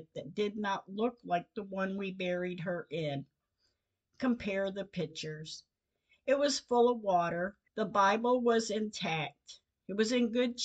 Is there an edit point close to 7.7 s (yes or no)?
yes